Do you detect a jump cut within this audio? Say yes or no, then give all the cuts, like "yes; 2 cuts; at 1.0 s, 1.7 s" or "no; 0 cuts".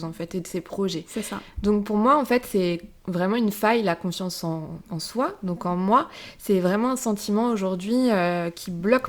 no; 0 cuts